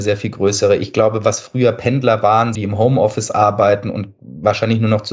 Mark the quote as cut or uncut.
cut